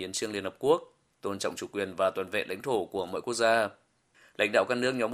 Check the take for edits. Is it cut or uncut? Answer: uncut